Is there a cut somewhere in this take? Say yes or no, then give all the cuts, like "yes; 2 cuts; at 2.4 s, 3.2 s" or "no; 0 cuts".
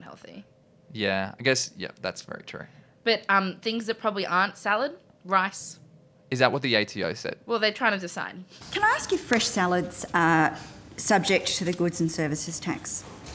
no; 0 cuts